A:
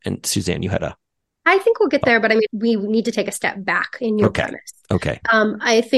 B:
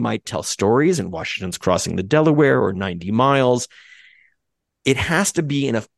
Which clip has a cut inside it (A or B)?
A